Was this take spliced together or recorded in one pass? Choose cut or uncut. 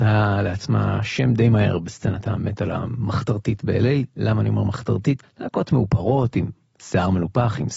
cut